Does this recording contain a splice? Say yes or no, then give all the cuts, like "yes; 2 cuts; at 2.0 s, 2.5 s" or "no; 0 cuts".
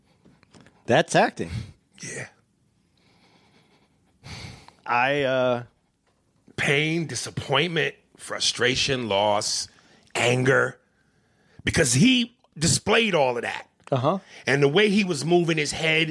yes; 1 cut; at 4.9 s